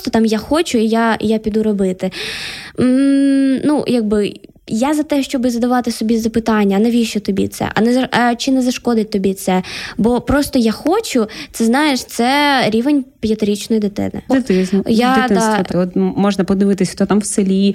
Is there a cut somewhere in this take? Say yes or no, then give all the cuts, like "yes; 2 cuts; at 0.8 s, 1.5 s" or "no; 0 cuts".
yes; 2 cuts; at 14.3 s, 15.7 s